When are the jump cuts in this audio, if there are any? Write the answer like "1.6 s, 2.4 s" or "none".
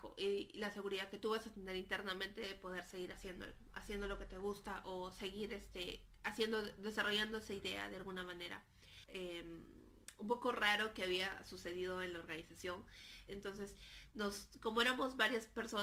9.1 s, 13.3 s